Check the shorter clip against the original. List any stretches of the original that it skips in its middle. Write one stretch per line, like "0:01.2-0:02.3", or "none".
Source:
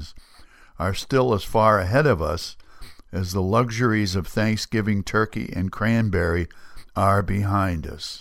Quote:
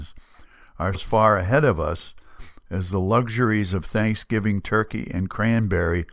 0:00.9-0:01.4